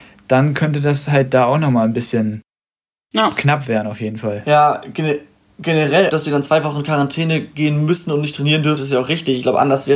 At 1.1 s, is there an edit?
no; 2 cuts; at 6.1 s, 8.8 s

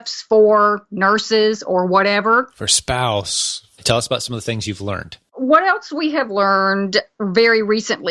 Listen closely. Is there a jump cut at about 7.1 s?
no; 1 cut; at 3.8 s

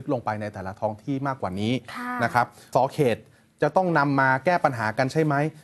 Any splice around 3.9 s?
no; 1 cut; at 2.7 s

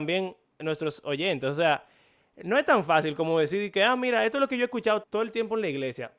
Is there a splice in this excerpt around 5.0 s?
yes; 1 cut; at 5.0 s

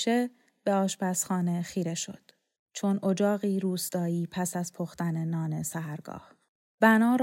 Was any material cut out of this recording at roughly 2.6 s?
yes; 1 cut; at 2.6 s

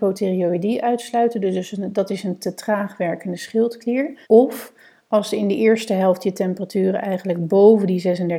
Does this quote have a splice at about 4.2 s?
yes; 1 cut; at 4.2 s

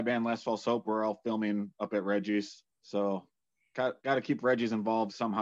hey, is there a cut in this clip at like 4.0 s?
no; 1 cut; at 2.7 s

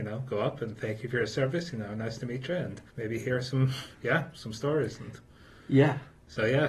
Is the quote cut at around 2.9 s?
yes; 1 cut; at 2.9 s

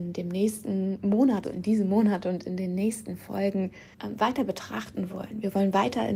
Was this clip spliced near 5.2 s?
no; 2 cuts; at 1.4 s, 3.9 s

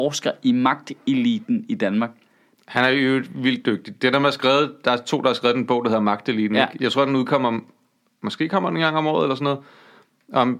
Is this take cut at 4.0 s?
no; 0 cuts

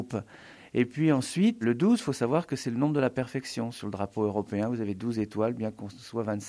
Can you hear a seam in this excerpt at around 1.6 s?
yes; 1 cut; at 1.6 s

